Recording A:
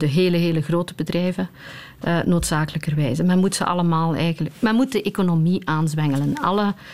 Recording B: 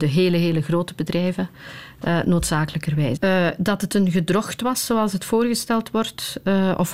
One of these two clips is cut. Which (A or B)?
B